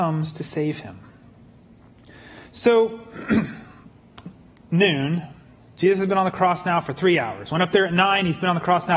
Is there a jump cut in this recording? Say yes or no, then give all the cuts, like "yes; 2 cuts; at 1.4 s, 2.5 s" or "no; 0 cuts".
no; 0 cuts